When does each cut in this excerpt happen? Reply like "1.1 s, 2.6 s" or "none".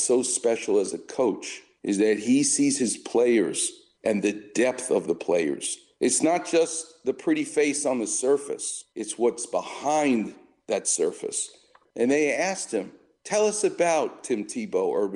11.9 s